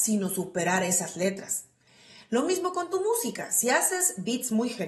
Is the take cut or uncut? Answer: uncut